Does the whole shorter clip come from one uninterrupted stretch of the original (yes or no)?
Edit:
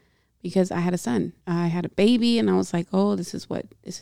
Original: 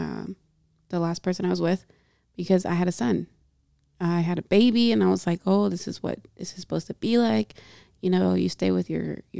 no